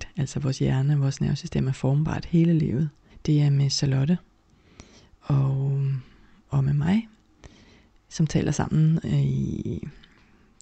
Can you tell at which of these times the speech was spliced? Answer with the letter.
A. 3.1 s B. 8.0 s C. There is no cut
A